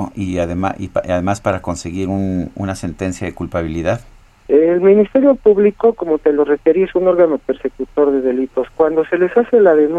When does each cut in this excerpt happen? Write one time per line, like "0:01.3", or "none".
0:04.5